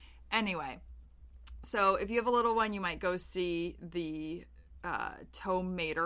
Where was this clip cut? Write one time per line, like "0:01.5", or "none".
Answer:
none